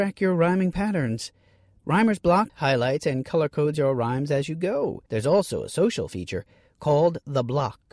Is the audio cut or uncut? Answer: cut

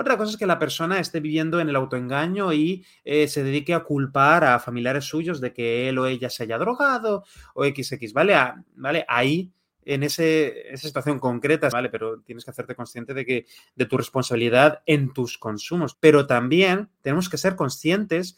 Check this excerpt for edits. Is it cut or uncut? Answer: cut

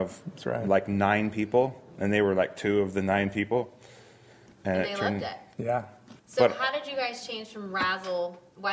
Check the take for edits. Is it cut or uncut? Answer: cut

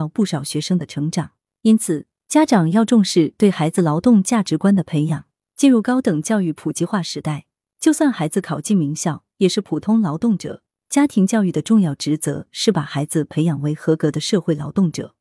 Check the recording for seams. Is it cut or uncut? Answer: uncut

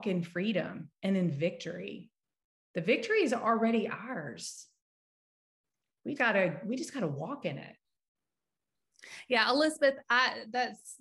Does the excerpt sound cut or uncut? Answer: cut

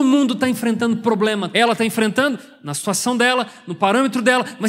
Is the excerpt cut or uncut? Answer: cut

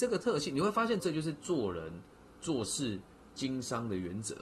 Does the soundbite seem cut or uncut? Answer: cut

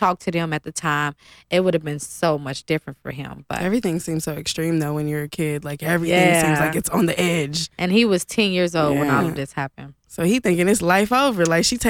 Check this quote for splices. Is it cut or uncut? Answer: uncut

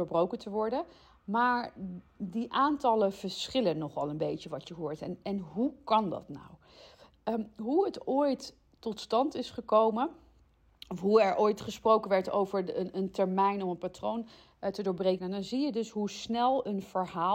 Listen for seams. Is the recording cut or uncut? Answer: cut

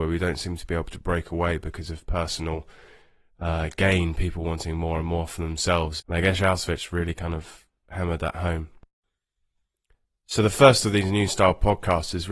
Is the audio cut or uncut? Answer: cut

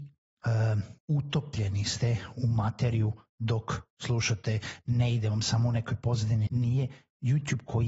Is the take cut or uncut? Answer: cut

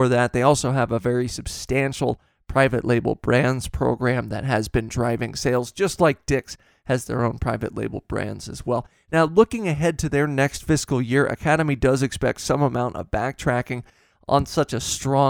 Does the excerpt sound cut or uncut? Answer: uncut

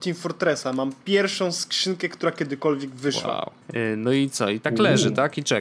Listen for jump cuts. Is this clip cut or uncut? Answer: cut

